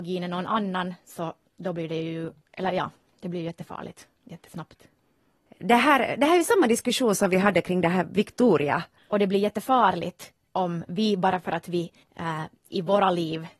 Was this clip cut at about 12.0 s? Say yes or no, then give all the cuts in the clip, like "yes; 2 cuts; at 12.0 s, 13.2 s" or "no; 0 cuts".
no; 1 cut; at 9.0 s